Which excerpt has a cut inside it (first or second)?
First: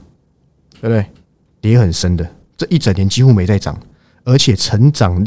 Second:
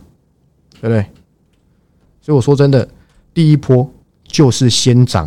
first